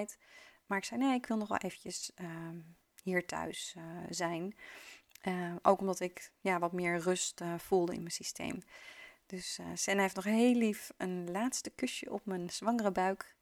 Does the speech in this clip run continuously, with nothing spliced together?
yes; 0 cuts

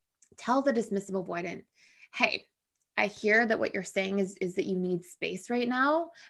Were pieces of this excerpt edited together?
no; 0 cuts

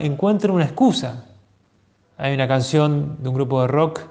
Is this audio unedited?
no; 1 cut; at 2.0 s

